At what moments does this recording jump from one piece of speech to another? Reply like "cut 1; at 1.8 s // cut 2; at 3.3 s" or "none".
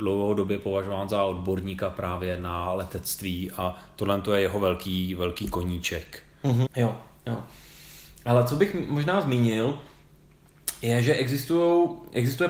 cut 1; at 6.7 s